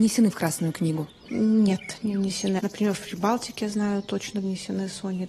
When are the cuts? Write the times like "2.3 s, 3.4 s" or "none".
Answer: 2.6 s